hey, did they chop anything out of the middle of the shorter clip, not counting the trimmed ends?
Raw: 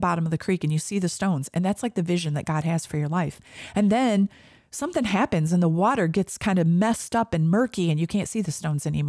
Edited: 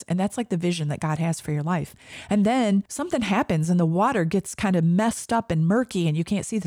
yes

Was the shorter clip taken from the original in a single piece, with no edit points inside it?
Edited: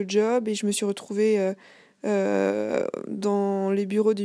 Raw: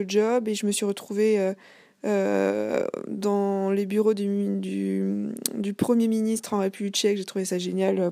yes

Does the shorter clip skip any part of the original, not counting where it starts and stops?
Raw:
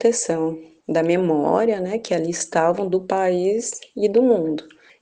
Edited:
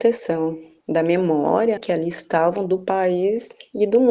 yes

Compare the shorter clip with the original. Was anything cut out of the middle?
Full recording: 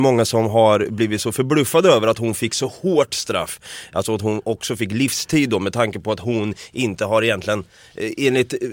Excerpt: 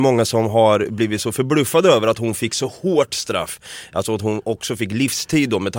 no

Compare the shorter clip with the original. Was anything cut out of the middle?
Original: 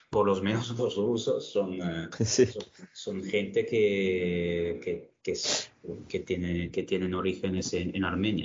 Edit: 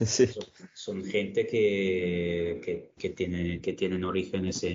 yes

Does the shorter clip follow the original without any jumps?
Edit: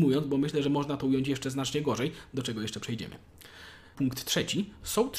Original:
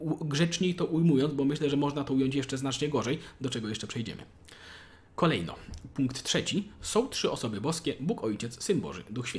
no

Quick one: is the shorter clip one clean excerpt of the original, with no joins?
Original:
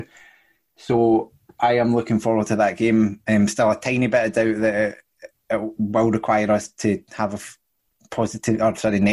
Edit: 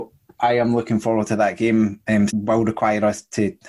no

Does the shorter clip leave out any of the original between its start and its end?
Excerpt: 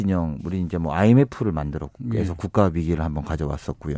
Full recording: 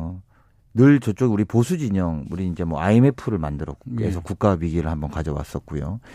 no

